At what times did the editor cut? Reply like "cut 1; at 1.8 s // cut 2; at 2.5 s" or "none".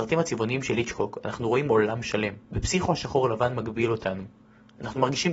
cut 1; at 2.4 s